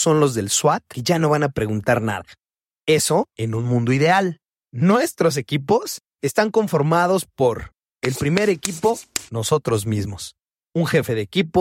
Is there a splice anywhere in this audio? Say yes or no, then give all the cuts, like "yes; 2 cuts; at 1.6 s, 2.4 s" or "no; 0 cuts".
yes; 1 cut; at 10.7 s